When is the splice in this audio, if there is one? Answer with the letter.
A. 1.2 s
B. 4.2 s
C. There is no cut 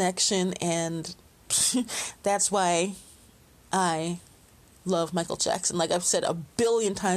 A